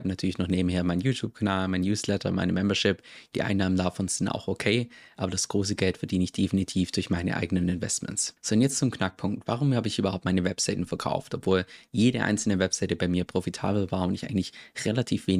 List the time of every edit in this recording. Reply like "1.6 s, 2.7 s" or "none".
none